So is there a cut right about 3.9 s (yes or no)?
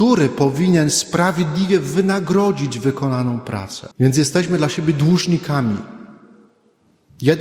yes